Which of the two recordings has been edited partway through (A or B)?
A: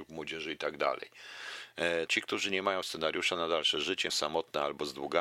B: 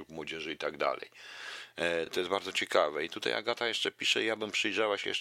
A